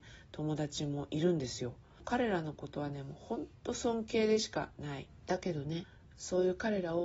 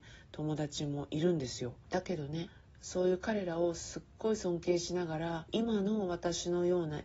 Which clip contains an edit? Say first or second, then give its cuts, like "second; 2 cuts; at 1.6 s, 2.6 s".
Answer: second; 1 cut; at 1.8 s